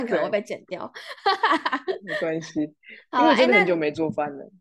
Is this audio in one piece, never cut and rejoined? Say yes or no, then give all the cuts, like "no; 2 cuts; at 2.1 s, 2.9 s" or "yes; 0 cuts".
yes; 0 cuts